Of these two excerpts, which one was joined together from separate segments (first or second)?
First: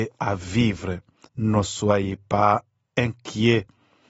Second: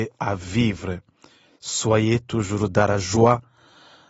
first